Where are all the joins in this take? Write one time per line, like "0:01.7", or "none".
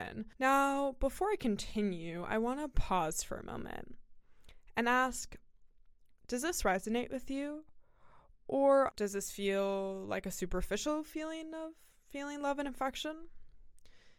0:08.9